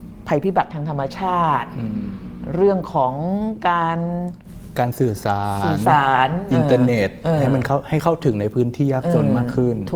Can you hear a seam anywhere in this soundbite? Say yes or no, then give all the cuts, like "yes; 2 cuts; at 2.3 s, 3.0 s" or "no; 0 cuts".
no; 0 cuts